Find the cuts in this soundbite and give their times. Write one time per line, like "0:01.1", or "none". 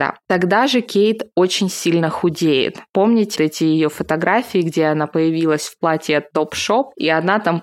0:03.3